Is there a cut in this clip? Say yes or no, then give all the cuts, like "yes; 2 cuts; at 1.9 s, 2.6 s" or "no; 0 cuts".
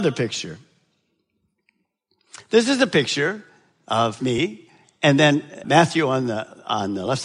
yes; 2 cuts; at 4.2 s, 5.6 s